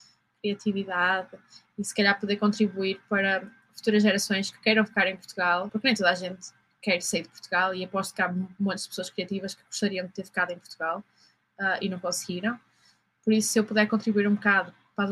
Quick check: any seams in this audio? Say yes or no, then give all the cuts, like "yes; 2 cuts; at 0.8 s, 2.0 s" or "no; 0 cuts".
yes; 1 cut; at 5.7 s